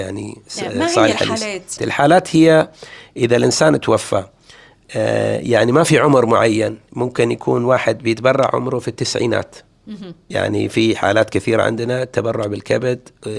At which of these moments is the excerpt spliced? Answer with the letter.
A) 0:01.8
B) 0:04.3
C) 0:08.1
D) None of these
A